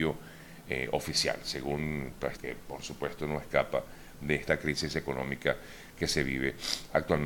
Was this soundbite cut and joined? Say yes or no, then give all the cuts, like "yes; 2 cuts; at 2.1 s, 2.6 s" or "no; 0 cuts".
yes; 1 cut; at 2.4 s